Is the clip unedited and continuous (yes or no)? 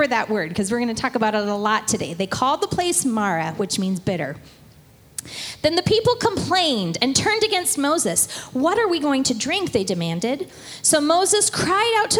yes